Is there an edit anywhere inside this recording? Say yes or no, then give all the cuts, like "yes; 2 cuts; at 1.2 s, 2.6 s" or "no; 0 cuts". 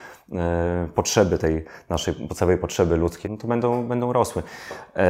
yes; 1 cut; at 3.2 s